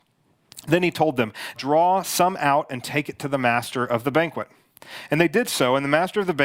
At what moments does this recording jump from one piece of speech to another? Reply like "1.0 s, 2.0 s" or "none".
1.6 s